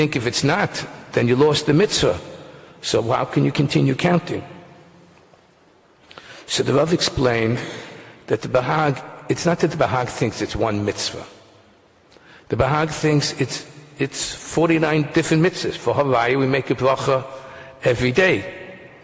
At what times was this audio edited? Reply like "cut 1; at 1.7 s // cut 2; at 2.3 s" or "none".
none